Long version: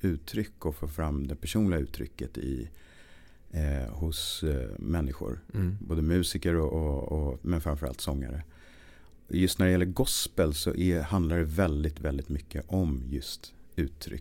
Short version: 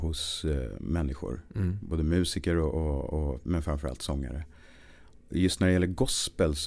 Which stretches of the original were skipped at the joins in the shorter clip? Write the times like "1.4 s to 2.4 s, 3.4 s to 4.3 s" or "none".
none

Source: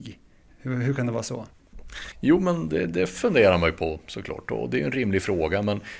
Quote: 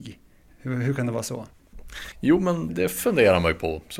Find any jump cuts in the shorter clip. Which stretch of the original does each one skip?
2.7 s to 2.9 s

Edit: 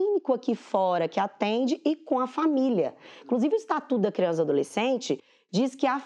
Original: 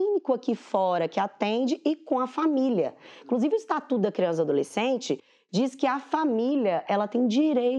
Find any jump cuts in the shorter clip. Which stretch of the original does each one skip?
none

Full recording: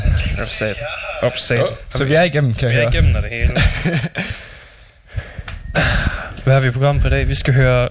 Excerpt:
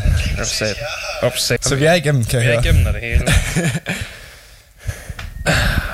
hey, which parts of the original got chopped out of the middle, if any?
1.6 s to 1.8 s

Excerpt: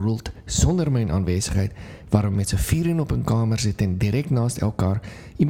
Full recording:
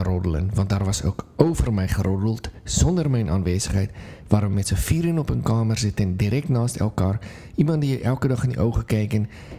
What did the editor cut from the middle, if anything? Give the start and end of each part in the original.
none

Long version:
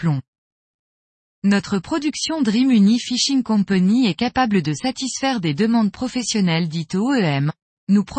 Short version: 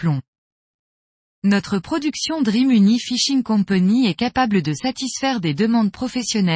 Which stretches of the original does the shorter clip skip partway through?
none

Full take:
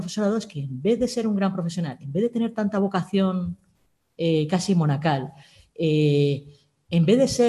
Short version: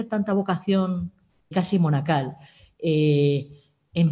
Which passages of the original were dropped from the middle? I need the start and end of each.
4.0 s to 4.5 s

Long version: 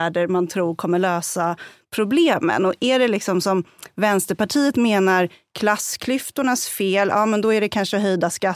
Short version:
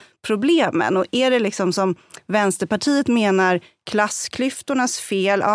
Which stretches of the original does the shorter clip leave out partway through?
none

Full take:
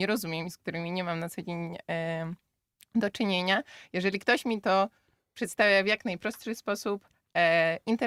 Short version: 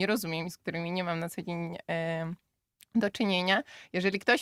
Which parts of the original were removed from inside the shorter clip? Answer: none

